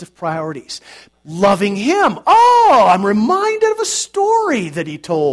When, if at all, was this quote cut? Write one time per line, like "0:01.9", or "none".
0:01.1